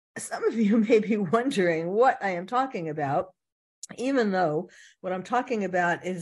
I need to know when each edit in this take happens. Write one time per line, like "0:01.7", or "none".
none